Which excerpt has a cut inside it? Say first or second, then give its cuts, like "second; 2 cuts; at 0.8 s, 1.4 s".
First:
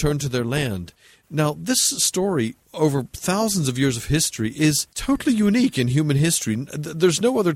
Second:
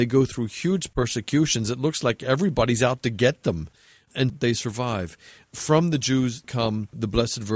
second; 2 cuts; at 4.3 s, 6.4 s